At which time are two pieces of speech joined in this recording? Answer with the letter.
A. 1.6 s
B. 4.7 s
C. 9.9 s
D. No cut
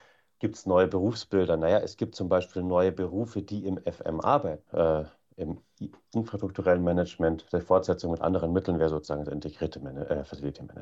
B